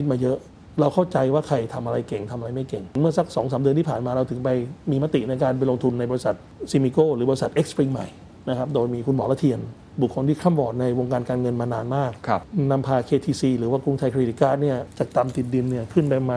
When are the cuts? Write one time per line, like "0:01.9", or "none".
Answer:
none